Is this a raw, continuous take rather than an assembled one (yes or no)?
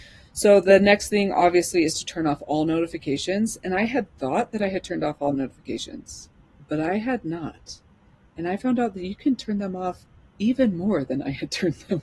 yes